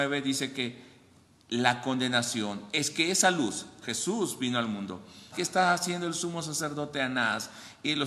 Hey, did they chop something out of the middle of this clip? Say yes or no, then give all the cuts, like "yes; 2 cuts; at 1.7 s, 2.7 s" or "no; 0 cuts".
yes; 2 cuts; at 3.8 s, 5.3 s